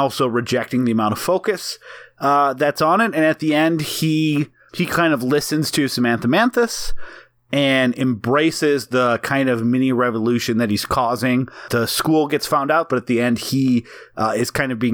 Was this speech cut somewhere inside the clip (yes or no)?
yes